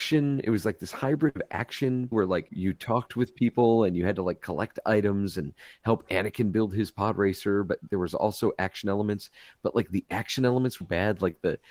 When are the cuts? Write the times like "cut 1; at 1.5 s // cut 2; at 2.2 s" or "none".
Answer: cut 1; at 2.1 s // cut 2; at 7.9 s // cut 3; at 10.8 s